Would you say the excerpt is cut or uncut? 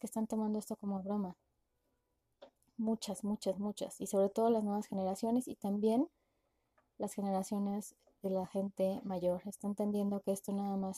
uncut